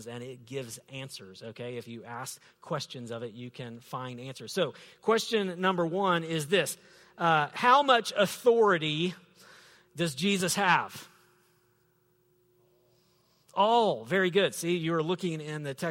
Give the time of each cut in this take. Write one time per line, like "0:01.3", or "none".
none